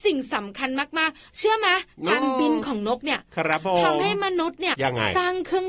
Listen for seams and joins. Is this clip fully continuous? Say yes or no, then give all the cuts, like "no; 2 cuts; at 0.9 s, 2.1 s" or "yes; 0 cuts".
no; 1 cut; at 4.7 s